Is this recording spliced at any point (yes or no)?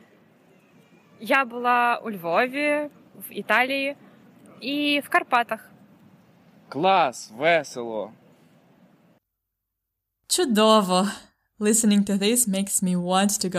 yes